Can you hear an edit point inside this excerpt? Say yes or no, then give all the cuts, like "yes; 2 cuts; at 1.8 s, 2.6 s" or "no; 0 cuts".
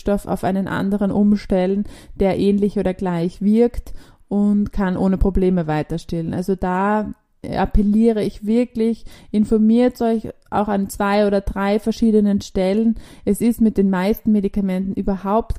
no; 0 cuts